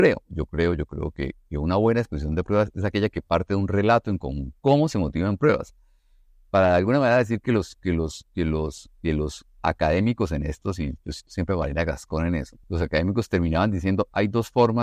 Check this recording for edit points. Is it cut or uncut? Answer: cut